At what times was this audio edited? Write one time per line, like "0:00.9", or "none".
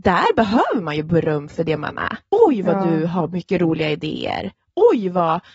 0:02.3